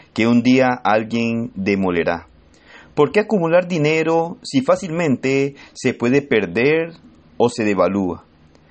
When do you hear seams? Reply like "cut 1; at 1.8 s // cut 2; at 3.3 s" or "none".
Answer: none